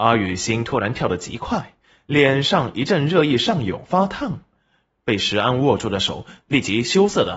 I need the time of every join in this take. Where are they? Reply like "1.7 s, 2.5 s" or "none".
none